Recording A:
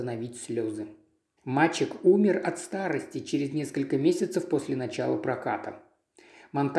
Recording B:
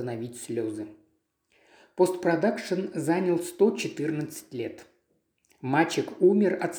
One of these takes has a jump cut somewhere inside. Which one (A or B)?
A